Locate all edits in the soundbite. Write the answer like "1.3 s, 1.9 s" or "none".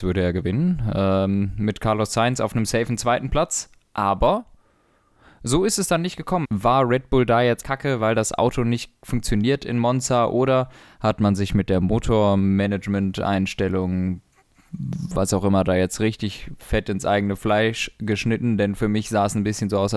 6.4 s, 7.6 s